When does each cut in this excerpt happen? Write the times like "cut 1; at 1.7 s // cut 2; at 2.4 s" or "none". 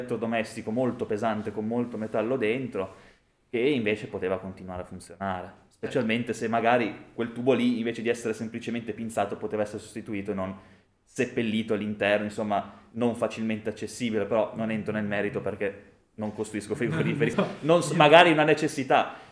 cut 1; at 17.3 s